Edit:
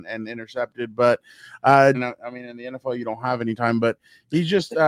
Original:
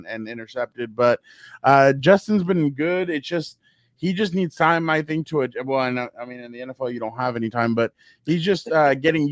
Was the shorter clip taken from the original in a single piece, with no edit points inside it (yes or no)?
no